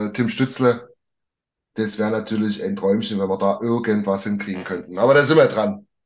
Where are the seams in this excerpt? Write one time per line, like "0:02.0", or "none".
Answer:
none